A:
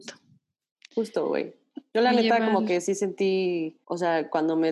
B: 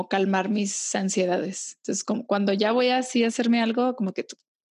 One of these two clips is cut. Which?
A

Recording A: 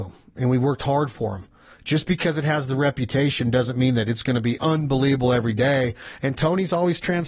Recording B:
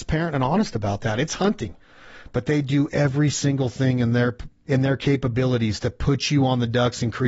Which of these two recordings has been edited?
B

